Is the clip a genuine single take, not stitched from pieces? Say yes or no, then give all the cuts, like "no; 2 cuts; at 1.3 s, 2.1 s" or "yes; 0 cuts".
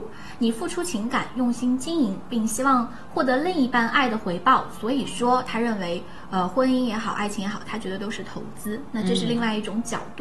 yes; 0 cuts